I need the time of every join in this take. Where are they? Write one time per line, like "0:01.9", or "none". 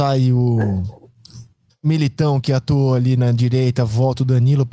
none

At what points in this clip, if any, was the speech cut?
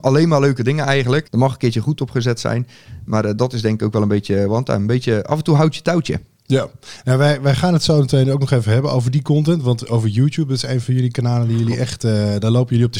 0:01.2

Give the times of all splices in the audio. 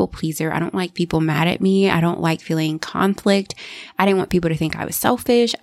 none

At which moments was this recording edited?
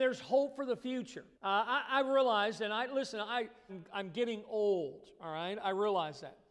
0:01.3
0:03.7

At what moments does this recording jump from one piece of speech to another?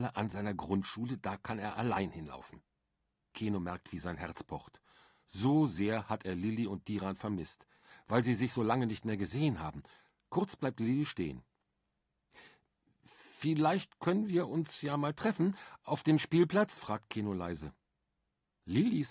0:03.2

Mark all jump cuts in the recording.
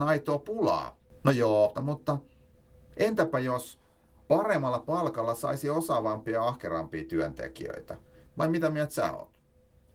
0:01.7
0:08.3

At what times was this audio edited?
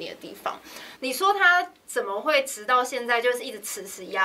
0:01.0

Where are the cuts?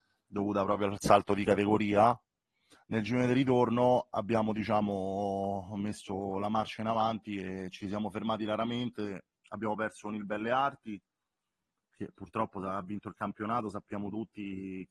none

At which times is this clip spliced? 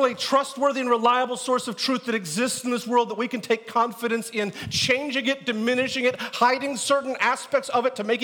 none

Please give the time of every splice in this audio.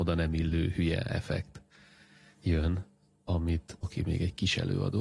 0:03.8

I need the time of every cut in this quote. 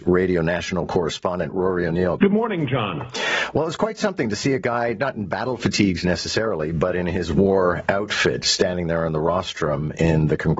0:02.2

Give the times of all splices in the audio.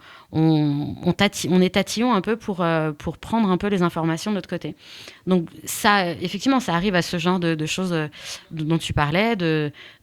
none

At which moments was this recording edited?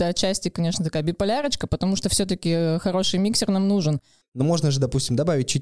0:04.2

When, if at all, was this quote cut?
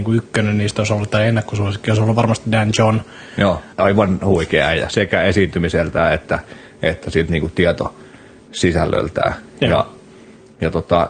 0:03.7

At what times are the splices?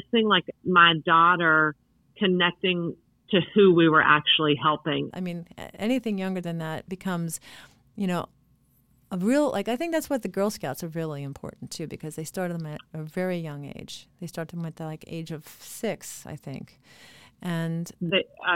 0:05.1

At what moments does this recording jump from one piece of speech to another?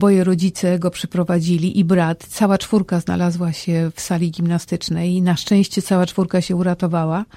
none

